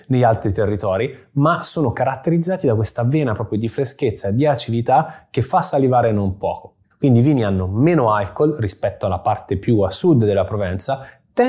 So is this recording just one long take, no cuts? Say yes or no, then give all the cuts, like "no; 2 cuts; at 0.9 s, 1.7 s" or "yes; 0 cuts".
no; 1 cut; at 6.9 s